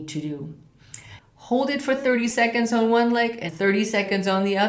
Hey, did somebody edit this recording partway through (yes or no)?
yes